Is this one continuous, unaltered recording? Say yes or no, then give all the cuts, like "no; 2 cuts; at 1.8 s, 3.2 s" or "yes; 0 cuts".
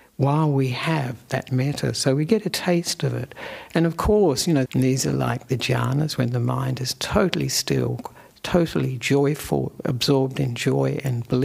no; 1 cut; at 4.7 s